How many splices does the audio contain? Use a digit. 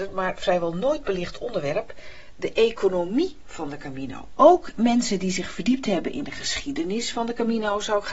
1